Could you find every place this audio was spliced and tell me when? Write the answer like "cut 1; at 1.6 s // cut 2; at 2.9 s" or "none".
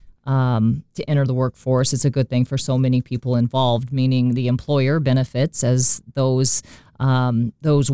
none